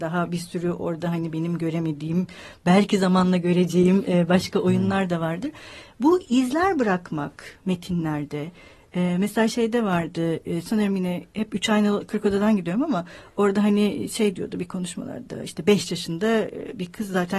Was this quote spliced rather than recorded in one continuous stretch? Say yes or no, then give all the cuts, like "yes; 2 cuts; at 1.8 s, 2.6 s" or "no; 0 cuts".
no; 0 cuts